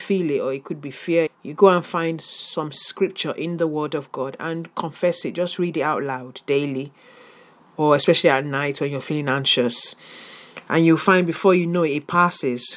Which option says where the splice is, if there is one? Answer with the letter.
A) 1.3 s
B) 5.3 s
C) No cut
A